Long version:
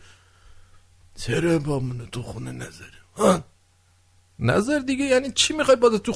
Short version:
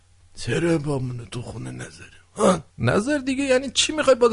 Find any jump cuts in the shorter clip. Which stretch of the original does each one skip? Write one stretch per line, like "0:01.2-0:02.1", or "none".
0:03.5-0:04.3